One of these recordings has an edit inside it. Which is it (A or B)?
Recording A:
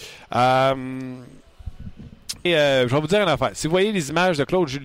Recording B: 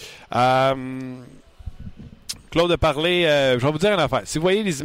A